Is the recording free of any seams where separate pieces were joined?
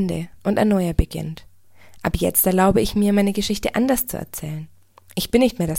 yes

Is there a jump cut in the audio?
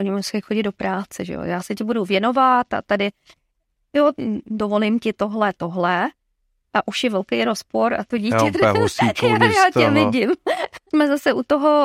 yes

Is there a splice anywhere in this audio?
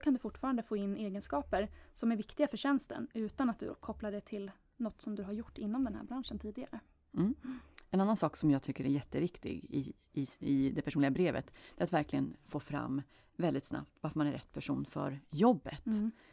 no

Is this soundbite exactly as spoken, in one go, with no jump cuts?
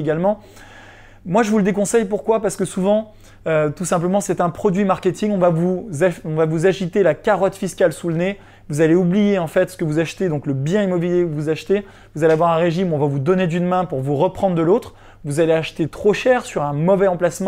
yes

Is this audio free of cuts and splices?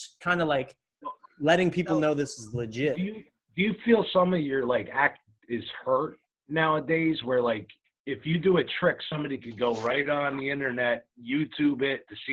no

